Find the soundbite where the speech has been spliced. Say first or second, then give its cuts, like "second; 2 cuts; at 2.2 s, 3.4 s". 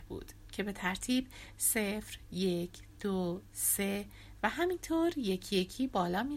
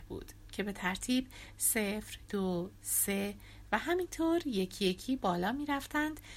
second; 1 cut; at 2.3 s